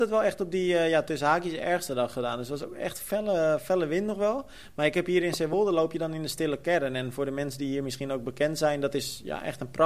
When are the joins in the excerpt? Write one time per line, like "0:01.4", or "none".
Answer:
none